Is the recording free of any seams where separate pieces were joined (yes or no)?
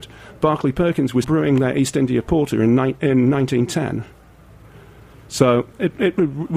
no